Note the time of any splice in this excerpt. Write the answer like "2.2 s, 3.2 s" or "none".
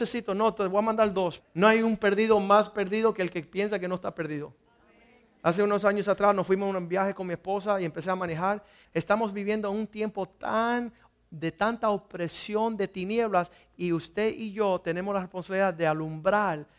1.4 s, 8.8 s